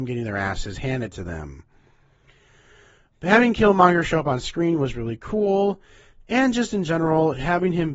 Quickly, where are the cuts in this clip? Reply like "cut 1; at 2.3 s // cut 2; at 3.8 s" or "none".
none